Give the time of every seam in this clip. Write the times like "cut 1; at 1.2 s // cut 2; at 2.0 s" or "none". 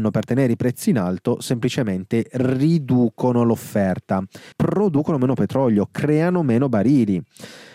cut 1; at 4.5 s